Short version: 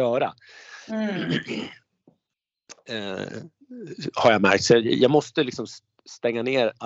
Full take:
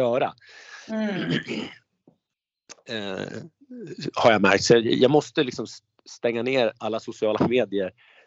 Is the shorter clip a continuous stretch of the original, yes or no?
yes